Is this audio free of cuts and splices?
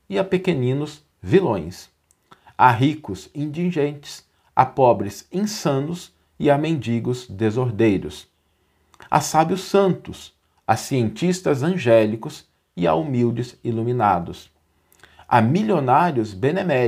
yes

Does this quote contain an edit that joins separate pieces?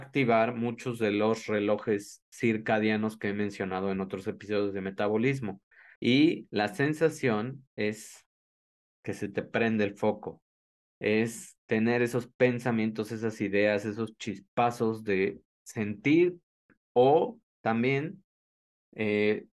yes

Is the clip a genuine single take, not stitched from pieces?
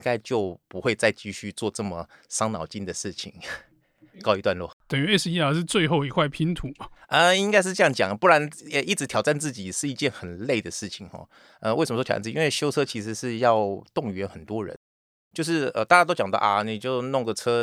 yes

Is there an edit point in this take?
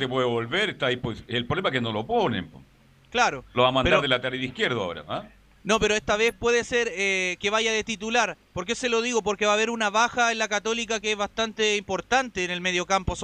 no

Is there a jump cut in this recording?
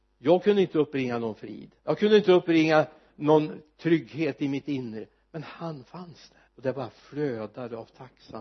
yes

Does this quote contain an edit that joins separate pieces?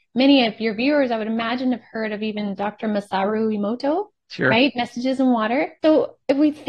yes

